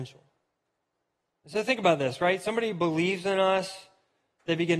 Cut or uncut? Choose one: uncut